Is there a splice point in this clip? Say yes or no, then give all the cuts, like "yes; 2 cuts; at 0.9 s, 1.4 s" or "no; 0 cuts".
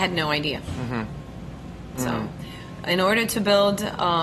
yes; 1 cut; at 1.9 s